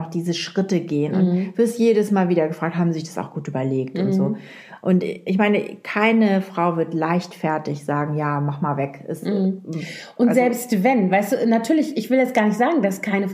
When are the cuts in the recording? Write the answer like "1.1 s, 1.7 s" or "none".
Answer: none